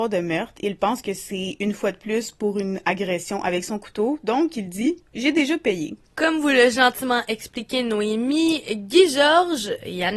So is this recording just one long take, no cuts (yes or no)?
no